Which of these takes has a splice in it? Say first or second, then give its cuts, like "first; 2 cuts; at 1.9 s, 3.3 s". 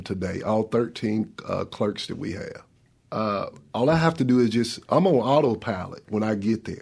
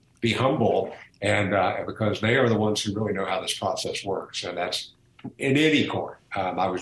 first; 1 cut; at 3.0 s